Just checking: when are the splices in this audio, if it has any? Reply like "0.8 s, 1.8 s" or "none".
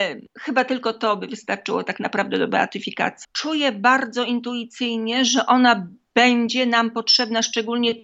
3.2 s